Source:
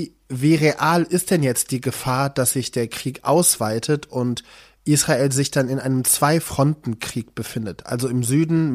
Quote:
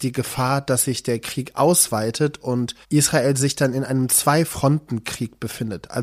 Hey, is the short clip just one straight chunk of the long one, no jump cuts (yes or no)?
no